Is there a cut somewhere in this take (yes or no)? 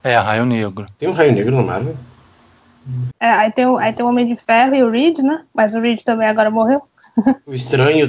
yes